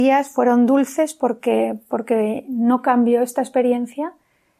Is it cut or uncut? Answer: uncut